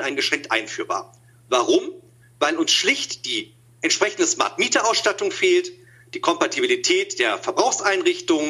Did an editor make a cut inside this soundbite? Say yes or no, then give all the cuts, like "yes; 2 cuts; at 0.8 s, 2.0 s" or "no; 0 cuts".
no; 0 cuts